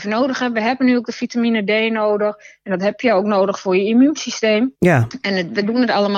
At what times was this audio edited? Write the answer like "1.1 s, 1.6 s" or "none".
4.8 s